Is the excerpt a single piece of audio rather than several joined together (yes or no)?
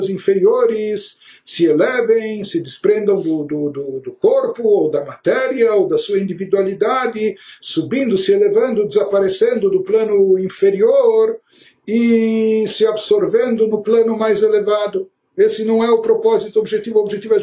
yes